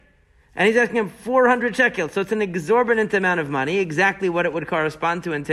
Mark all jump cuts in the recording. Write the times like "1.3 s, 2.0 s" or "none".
none